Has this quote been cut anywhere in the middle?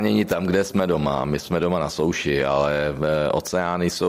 no; 0 cuts

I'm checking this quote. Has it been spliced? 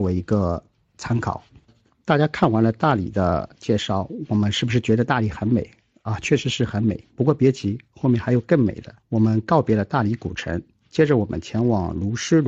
yes; 1 cut; at 9.0 s

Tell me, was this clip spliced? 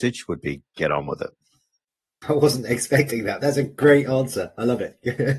yes; 1 cut; at 3.4 s

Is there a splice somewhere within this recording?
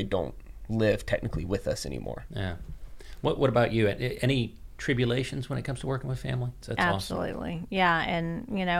yes; 1 cut; at 6.6 s

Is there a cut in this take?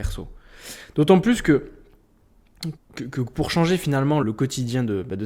yes; 2 cuts; at 2.8 s, 4.2 s

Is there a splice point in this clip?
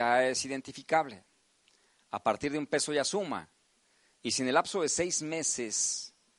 no; 0 cuts

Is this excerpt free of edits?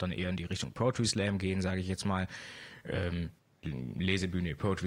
yes; 0 cuts

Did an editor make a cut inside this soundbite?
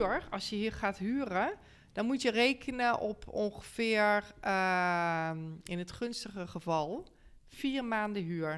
no; 0 cuts

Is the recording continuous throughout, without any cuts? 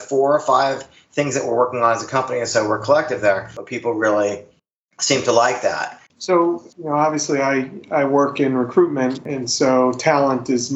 no; 1 cut; at 6.1 s

